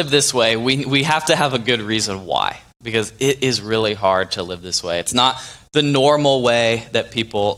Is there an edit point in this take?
no; 0 cuts

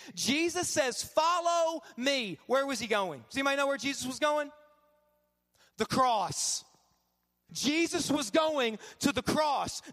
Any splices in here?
yes; 1 cut; at 7.5 s

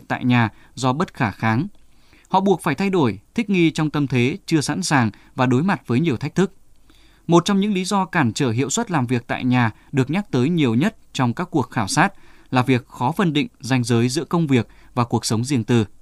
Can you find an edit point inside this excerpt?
no; 0 cuts

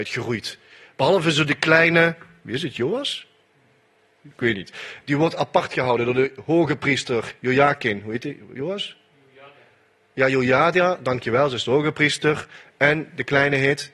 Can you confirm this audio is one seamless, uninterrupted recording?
yes; 0 cuts

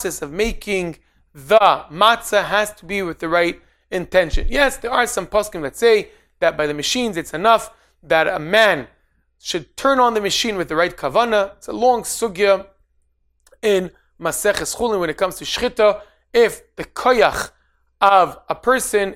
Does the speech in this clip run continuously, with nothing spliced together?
yes; 0 cuts

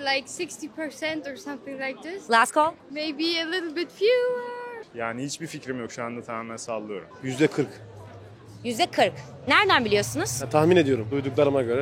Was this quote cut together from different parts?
yes; 2 cuts; at 2.8 s, 4.8 s

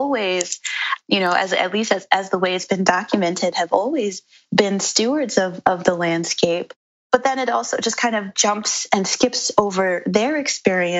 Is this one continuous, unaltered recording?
yes; 0 cuts

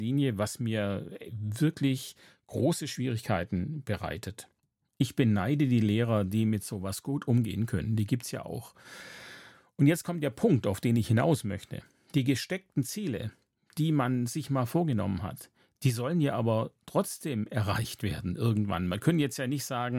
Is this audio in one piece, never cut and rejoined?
yes; 0 cuts

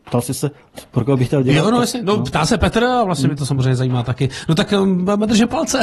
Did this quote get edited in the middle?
no; 0 cuts

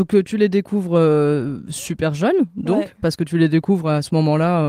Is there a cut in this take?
no; 0 cuts

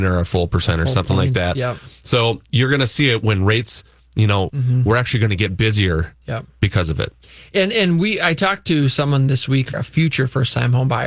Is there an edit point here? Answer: yes; 2 cuts; at 4.5 s, 9.7 s

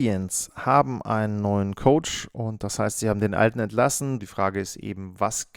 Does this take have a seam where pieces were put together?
yes; 1 cut; at 4.2 s

